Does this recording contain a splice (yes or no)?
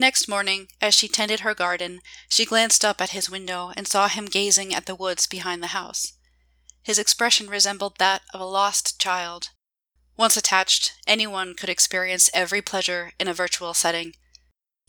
yes